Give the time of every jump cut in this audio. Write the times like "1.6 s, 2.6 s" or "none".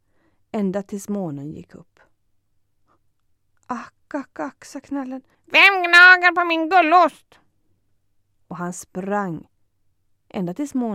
5.3 s